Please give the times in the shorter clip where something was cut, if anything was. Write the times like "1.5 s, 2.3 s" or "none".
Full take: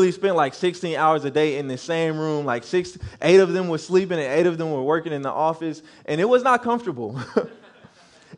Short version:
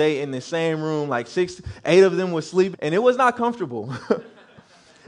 2.7 s

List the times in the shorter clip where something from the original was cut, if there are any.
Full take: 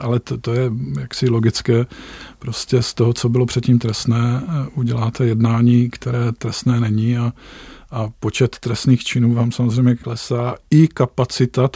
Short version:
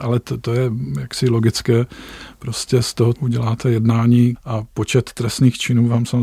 3.1 s, 4.4 s

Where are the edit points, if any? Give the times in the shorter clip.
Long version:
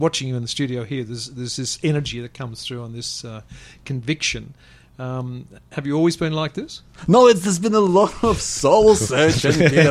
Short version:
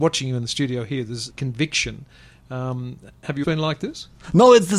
1.3 s, 3.4 s

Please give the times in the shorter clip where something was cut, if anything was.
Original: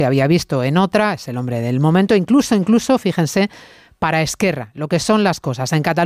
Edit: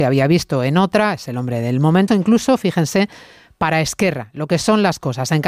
2.1 s

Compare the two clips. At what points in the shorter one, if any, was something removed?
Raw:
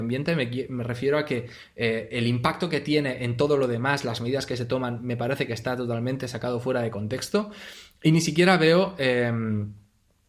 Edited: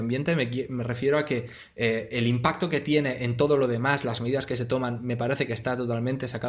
none

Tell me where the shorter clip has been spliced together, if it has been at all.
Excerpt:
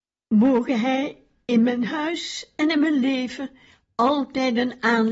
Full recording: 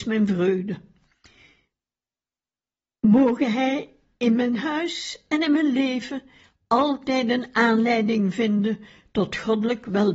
none

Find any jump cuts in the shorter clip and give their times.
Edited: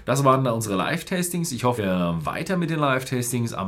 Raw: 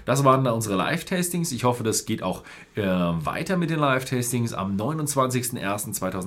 1.8 s

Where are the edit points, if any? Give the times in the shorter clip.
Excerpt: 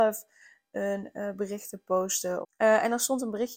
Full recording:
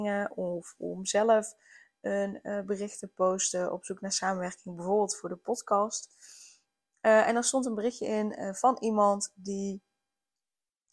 2.4 s

